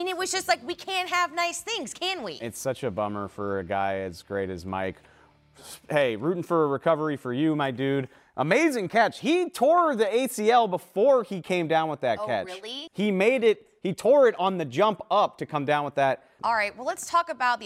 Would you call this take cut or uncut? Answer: cut